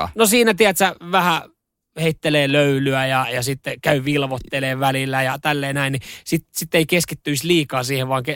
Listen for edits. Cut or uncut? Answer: uncut